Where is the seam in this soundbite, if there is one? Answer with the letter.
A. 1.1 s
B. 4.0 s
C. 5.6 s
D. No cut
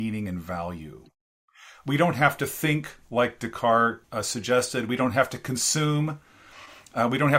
B